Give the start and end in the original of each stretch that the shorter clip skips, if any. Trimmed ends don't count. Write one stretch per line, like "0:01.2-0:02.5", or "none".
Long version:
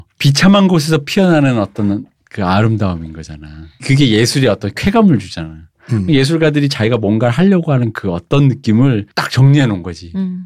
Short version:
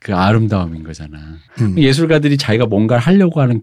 0:03.8-0:05.8